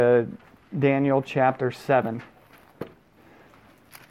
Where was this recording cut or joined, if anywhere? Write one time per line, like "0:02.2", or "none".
none